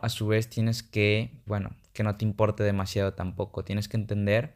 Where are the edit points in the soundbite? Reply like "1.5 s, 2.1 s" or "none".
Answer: 1.5 s

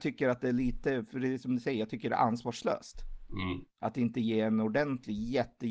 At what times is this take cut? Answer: 3.7 s

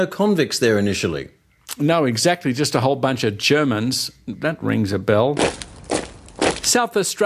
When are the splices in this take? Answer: none

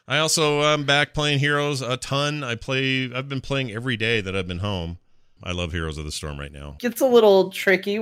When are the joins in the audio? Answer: 5.4 s, 6.8 s

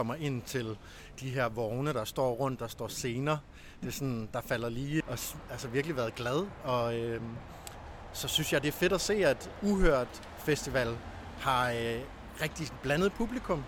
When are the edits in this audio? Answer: 5.0 s

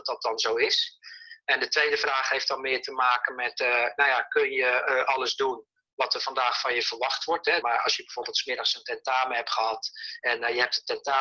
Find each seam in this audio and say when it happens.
7.6 s, 10.2 s

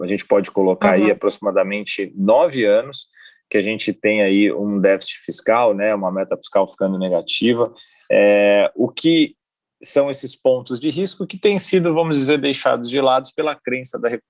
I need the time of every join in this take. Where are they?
none

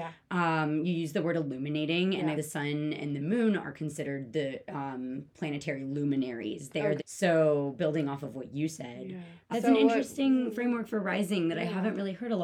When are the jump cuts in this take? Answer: 2.3 s, 7.0 s, 9.5 s

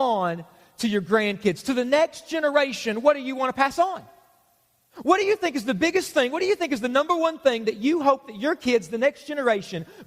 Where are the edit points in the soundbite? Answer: none

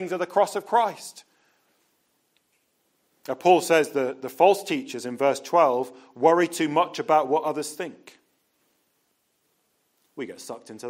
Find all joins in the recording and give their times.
none

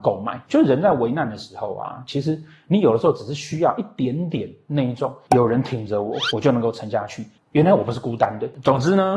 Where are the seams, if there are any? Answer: 7.4 s

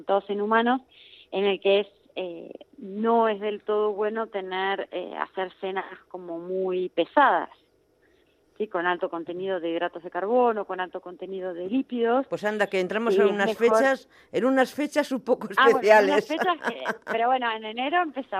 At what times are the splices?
none

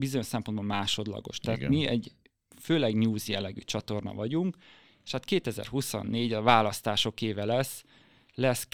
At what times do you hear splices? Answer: none

